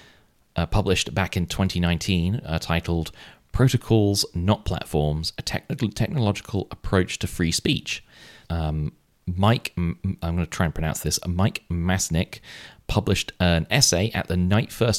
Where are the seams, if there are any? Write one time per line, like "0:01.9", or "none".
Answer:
0:08.4